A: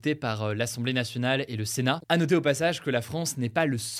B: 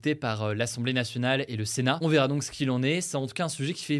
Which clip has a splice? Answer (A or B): A